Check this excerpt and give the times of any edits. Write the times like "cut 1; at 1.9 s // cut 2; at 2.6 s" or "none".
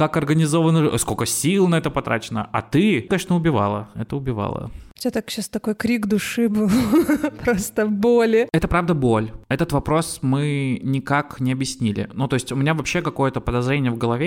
cut 1; at 3.1 s